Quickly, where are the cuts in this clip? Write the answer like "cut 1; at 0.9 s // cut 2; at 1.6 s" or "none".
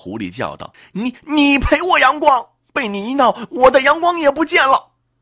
none